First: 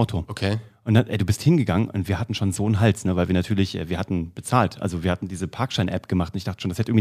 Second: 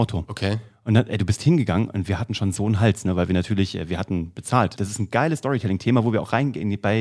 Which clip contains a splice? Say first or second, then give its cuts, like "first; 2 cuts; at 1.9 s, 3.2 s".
second; 1 cut; at 4.8 s